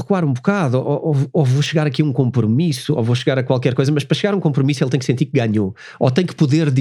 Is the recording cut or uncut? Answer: uncut